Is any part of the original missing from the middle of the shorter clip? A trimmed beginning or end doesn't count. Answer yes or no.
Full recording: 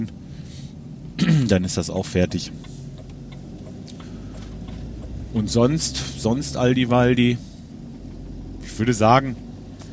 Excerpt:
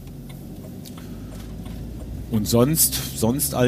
no